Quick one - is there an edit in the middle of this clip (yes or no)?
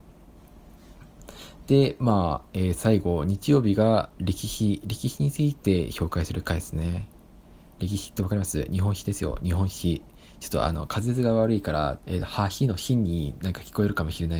yes